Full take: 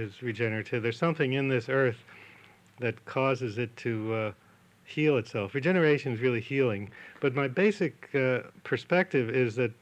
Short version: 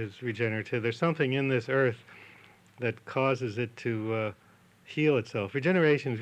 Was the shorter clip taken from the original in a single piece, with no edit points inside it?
yes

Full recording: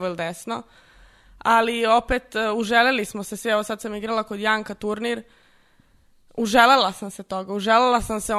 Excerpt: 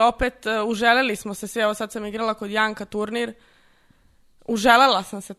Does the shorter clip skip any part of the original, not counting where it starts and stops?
no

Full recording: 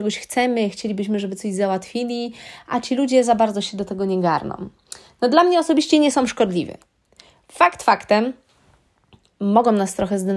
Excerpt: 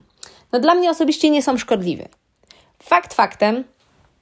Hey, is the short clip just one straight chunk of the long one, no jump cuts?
yes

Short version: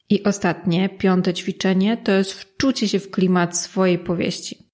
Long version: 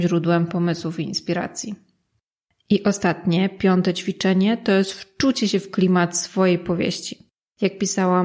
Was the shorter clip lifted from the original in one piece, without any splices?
yes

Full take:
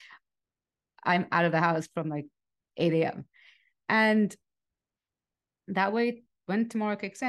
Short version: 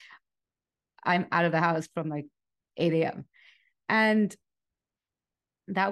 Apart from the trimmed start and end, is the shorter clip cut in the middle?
no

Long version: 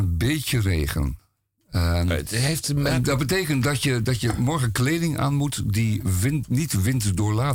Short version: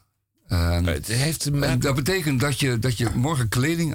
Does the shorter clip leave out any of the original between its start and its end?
no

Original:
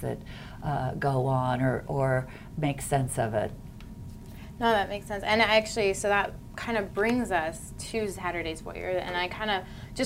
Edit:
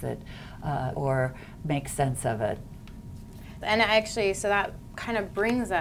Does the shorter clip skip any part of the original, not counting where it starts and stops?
yes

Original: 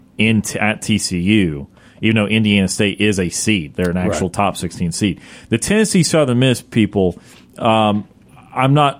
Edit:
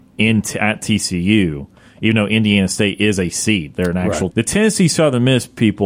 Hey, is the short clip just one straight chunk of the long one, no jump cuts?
no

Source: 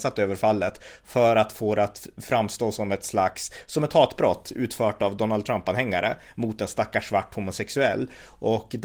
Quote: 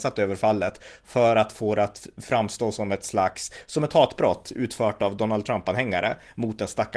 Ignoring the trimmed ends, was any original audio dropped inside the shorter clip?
no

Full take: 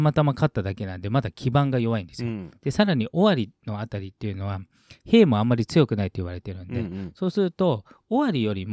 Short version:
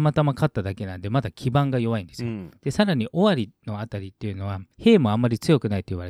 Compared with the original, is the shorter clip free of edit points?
no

